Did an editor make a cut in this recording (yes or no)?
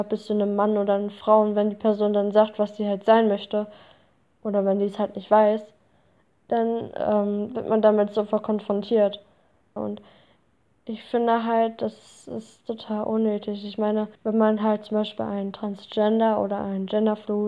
yes